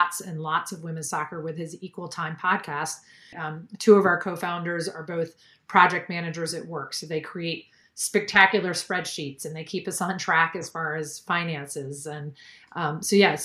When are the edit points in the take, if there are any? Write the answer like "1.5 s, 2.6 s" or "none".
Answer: 3.3 s